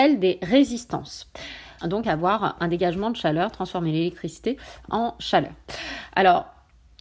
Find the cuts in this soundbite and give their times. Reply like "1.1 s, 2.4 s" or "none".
1.8 s